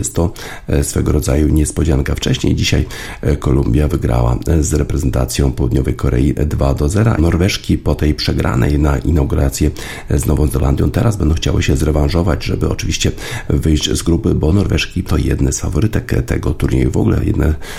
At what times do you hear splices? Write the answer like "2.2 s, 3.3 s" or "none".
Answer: 7.2 s, 15.0 s